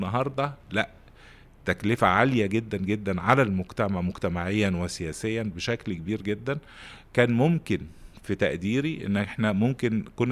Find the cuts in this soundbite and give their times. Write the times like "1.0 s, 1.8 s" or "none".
none